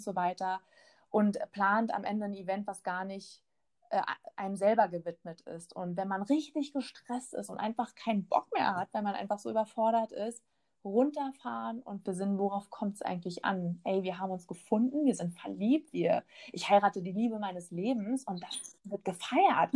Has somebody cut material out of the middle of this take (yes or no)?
yes